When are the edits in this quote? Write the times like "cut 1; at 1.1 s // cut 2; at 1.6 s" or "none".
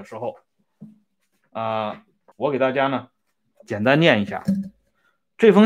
cut 1; at 2.3 s